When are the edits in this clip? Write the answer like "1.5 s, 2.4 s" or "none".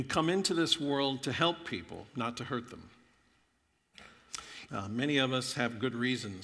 4.7 s